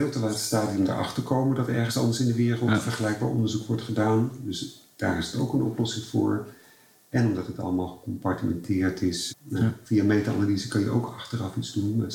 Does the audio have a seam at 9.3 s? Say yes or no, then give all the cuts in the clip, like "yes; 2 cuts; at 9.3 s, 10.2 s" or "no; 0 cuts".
yes; 1 cut; at 9.3 s